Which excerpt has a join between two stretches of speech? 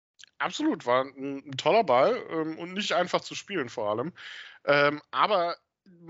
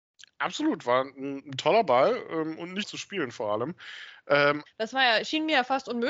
second; 2 cuts; at 2.8 s, 4.7 s

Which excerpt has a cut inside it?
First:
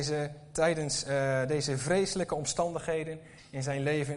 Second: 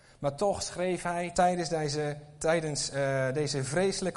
second; 1 cut; at 1.3 s

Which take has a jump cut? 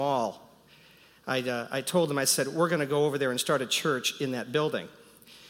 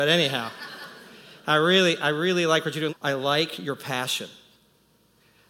second; 1 cut; at 2.9 s

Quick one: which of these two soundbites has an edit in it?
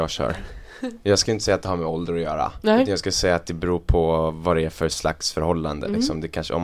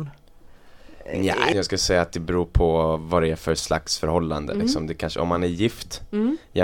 second; 1 cut; at 1.5 s

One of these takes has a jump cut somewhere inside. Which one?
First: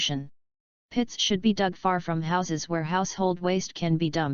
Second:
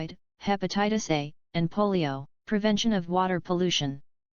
second; 1 cut; at 2.3 s

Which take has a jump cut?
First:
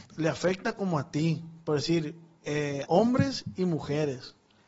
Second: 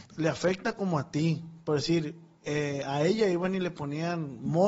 first; 1 cut; at 2.8 s

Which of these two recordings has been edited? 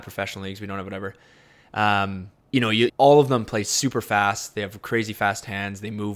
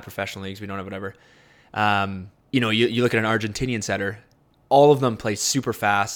first; 1 cut; at 2.9 s

